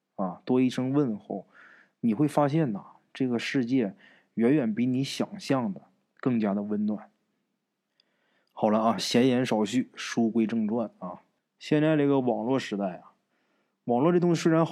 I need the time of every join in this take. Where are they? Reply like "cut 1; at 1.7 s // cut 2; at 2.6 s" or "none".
cut 1; at 11.4 s